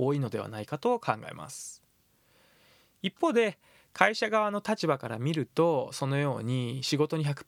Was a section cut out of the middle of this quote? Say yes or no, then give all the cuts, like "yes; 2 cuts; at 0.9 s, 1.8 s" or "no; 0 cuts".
no; 0 cuts